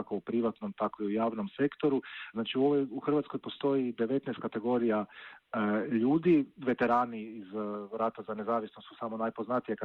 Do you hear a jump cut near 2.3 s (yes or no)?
yes